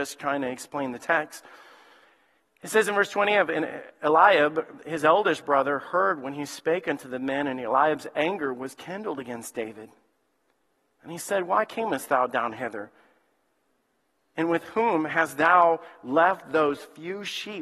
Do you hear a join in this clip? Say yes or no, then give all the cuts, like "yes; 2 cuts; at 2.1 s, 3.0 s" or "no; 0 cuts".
no; 0 cuts